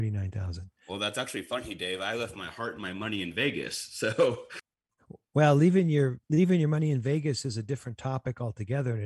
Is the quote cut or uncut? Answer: uncut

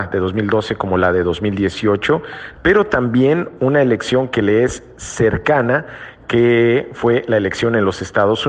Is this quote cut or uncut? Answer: cut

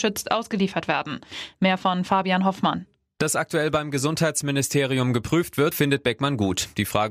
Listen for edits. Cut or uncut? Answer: cut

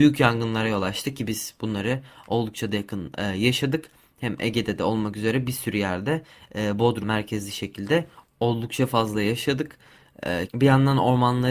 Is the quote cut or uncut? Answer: cut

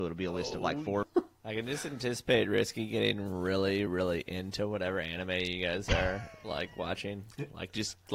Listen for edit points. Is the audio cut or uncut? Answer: cut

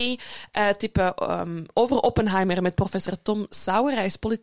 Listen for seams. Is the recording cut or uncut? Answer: uncut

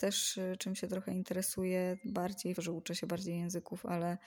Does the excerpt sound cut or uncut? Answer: cut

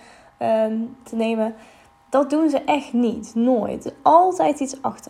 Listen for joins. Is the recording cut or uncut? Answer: cut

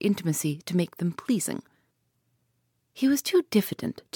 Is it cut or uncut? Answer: uncut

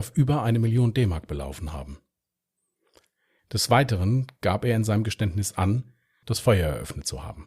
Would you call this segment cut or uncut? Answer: cut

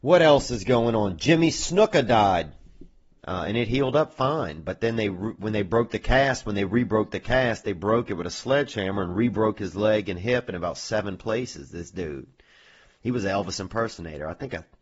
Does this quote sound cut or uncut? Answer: cut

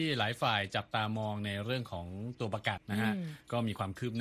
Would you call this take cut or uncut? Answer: cut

